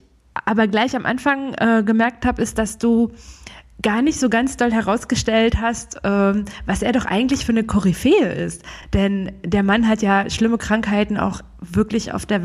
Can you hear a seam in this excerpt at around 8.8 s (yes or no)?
no